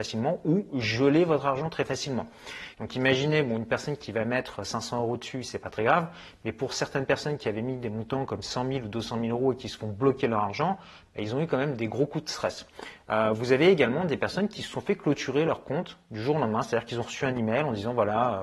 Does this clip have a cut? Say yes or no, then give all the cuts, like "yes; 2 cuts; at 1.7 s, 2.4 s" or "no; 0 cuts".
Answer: yes; 1 cut; at 2.7 s